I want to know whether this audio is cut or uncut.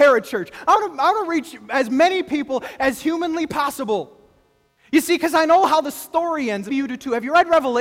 cut